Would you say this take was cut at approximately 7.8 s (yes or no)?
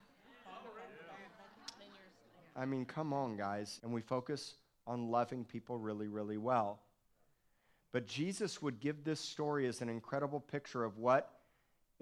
no